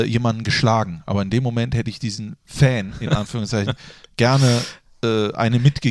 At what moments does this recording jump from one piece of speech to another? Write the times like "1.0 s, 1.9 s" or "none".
none

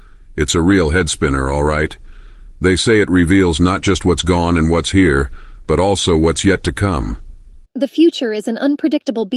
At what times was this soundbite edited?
7.7 s

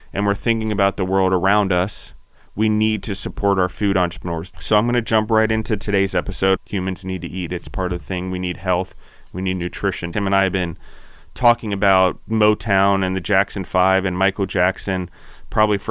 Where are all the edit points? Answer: 4.5 s, 6.6 s, 10.1 s

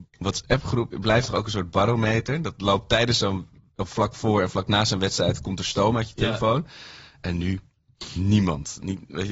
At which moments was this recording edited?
none

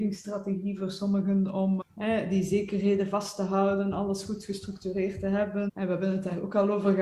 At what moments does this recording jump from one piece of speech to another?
1.8 s, 5.7 s

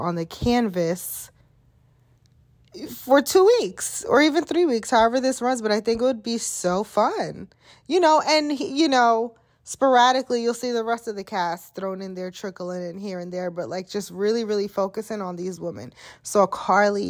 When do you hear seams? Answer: none

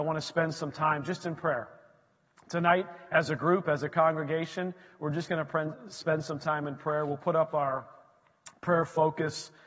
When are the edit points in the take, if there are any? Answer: none

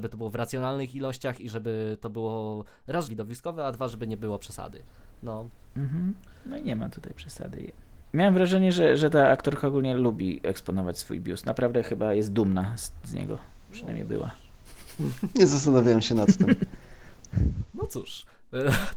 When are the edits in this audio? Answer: 3.1 s, 8.0 s

